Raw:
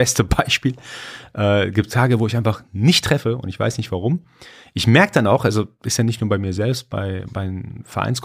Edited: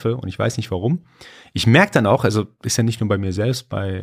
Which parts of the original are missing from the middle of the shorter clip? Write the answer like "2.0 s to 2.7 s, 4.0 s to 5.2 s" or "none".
none